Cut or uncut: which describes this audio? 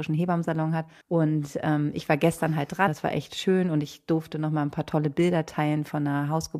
cut